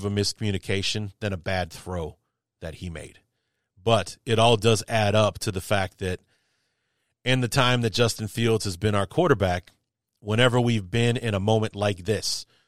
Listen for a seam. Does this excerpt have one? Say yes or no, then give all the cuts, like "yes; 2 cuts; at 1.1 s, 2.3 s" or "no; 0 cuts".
no; 0 cuts